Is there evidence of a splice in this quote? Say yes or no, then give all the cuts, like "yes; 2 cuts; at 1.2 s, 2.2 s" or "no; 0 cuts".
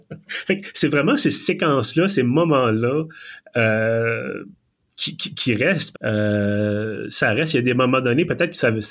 yes; 1 cut; at 5.9 s